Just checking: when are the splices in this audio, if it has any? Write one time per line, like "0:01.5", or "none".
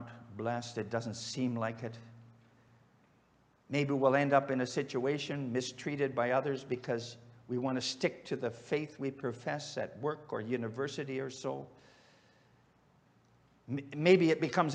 none